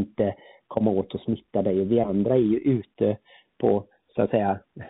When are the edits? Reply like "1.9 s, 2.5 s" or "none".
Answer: none